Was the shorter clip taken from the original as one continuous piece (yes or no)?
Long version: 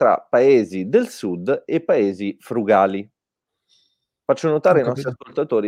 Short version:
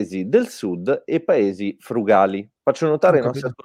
no